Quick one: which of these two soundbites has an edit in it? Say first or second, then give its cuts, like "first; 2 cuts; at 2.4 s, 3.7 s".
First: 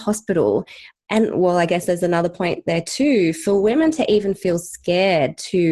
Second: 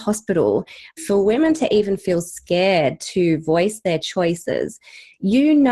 second; 1 cut; at 1.0 s